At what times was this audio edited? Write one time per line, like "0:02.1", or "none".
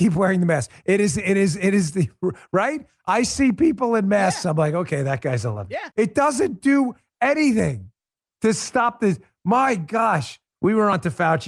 0:05.9
0:10.5